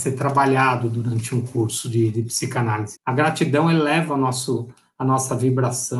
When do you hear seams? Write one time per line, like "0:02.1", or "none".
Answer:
0:03.0